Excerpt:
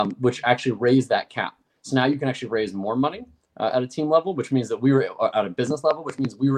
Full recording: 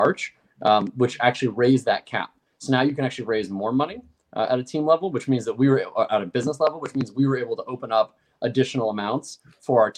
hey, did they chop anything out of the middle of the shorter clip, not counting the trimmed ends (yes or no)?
no